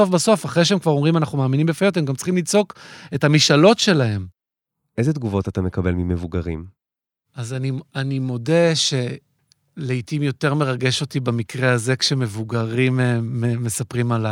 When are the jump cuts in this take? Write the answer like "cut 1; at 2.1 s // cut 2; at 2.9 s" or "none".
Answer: none